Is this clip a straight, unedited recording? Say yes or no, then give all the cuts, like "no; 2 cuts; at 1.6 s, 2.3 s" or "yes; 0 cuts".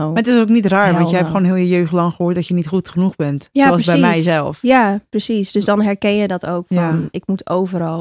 yes; 0 cuts